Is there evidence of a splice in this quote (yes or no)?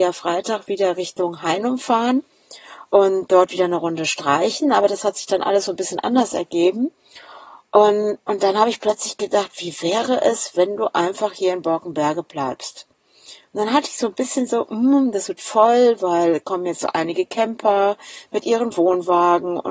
no